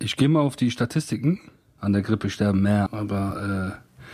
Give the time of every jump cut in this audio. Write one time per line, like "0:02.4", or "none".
0:01.8
0:02.9